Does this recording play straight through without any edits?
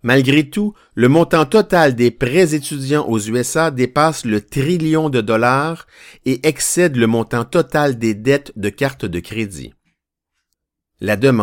yes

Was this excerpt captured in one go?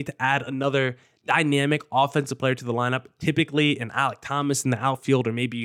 yes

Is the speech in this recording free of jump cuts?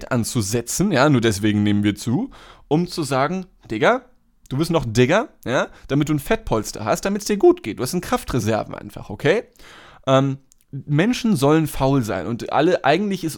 yes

